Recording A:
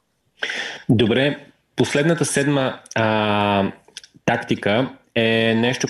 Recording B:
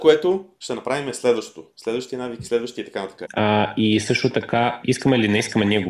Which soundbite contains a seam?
B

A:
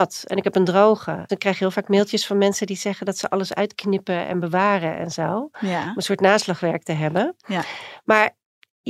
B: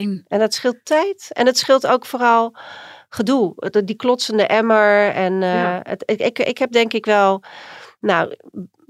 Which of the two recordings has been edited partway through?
A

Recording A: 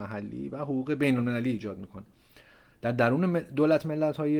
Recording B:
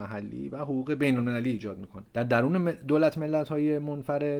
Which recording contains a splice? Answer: B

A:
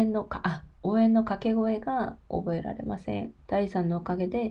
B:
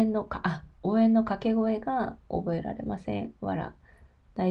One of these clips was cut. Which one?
A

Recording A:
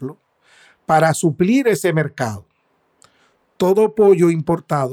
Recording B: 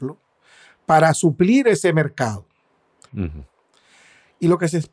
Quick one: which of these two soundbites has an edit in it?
B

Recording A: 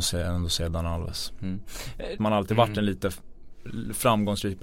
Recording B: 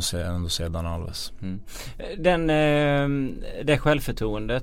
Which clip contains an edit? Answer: A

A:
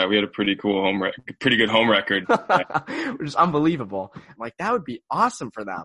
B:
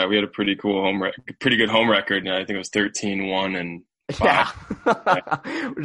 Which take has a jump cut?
A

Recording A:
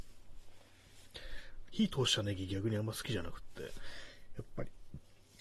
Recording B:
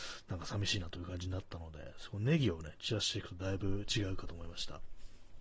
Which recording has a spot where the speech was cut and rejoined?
A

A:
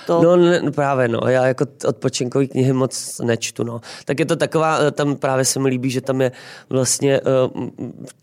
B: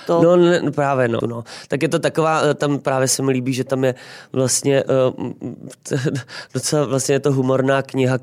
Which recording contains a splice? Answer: B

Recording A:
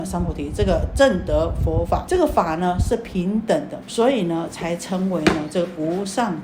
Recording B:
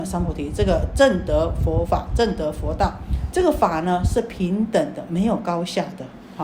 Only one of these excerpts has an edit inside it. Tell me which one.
A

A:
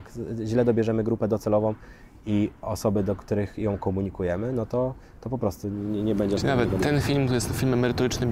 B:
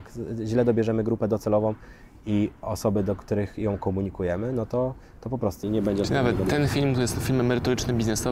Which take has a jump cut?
B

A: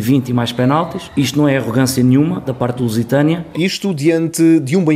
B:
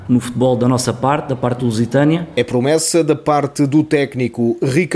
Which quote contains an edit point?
A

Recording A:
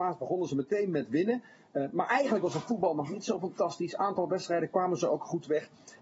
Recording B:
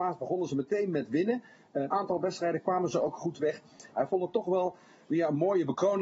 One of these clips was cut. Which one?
B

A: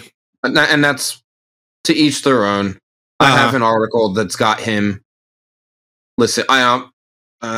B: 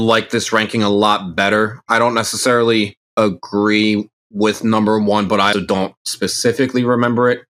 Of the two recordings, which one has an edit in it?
B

